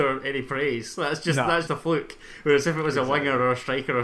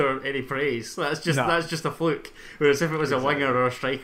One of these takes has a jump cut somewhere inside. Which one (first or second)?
first